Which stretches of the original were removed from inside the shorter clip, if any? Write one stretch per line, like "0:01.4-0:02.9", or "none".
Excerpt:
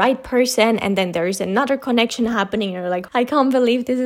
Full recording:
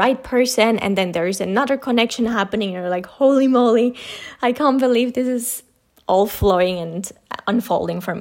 0:03.1-0:04.4